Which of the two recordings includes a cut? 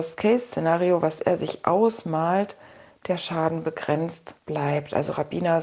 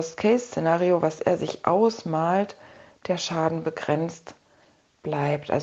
first; 1 cut; at 4.4 s

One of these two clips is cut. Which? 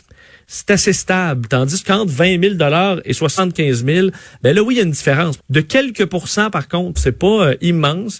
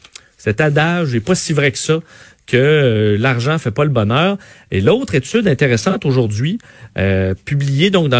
first; 2 cuts; at 5.4 s, 6.9 s

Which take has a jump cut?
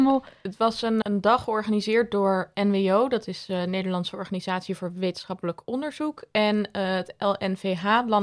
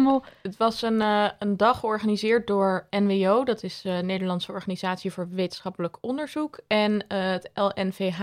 first; 1 cut; at 1.0 s

